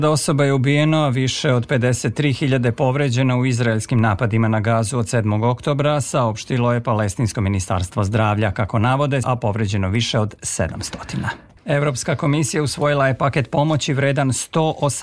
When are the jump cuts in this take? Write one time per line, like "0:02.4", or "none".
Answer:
0:09.2
0:11.6